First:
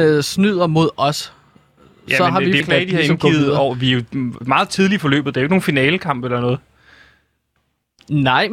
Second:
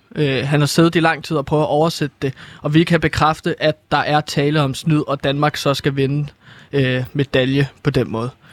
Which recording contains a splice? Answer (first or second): first